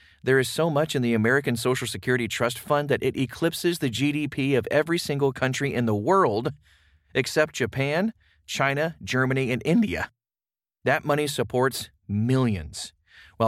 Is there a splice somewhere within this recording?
no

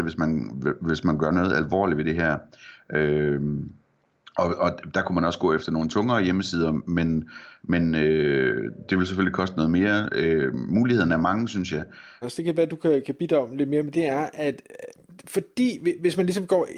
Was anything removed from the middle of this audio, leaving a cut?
yes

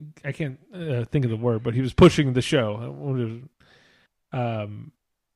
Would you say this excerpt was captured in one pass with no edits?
yes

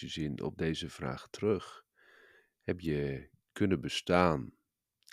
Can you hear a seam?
no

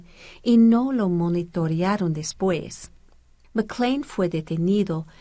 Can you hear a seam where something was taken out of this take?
yes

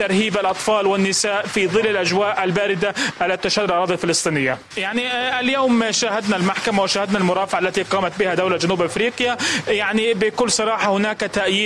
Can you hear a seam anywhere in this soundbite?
yes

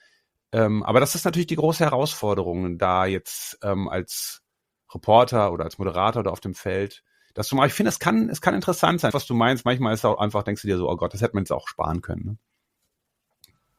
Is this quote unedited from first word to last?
no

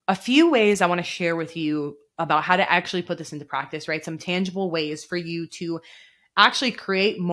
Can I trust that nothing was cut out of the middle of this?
yes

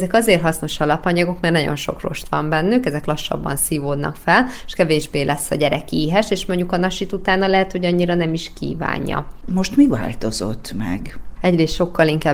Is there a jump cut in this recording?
yes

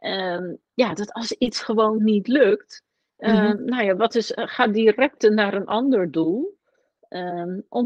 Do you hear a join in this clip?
no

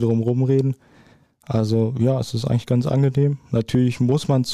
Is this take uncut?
yes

